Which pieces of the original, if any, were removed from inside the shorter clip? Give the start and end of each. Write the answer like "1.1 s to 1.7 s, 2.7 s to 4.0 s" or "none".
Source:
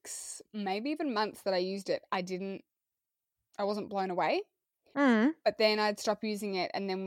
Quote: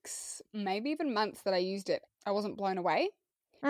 2.1 s to 3.4 s